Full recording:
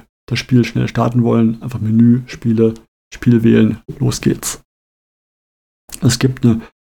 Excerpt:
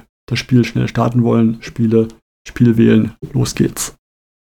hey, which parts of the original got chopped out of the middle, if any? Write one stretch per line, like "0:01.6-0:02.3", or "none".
0:01.6-0:02.3